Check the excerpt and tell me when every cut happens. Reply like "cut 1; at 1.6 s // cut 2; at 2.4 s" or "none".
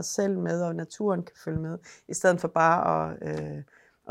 none